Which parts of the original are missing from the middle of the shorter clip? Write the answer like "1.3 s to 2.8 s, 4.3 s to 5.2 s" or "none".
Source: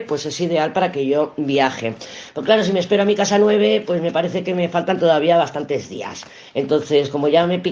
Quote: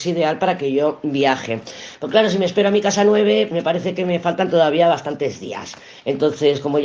3.9 s to 4.0 s